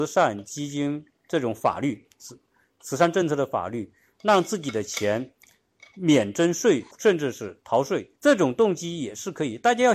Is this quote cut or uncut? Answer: cut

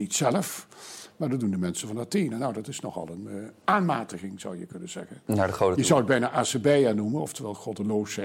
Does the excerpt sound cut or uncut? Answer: uncut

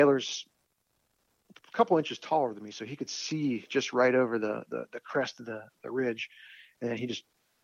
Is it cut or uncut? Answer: uncut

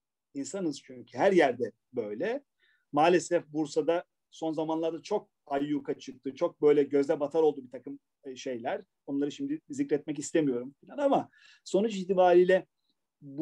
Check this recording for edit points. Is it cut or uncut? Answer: uncut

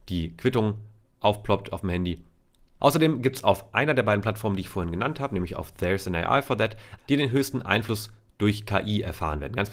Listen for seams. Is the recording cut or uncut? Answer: cut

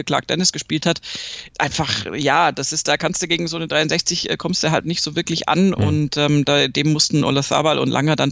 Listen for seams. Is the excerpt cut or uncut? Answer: cut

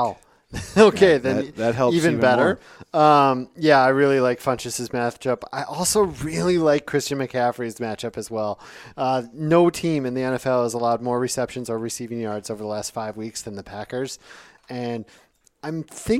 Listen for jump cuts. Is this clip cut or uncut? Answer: uncut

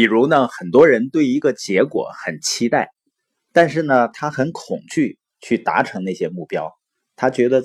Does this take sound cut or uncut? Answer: uncut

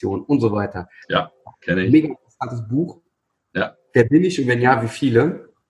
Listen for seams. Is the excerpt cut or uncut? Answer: cut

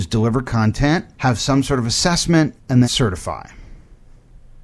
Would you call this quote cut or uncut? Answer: cut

